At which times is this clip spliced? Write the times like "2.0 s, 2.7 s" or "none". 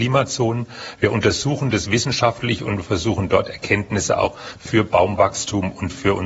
none